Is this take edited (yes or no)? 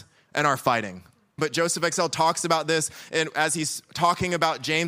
yes